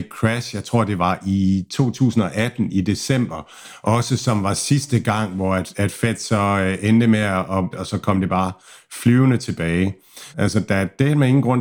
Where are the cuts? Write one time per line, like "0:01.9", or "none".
0:07.7
0:10.3

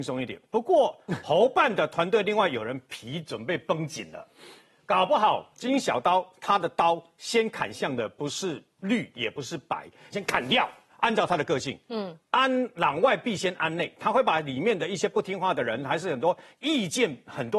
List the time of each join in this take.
0:10.1

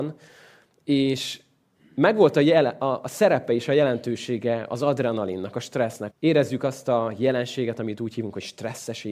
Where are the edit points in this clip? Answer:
0:06.1

